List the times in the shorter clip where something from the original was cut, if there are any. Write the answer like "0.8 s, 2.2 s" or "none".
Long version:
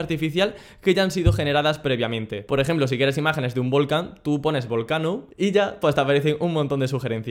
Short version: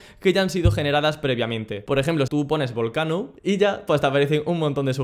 2.3 s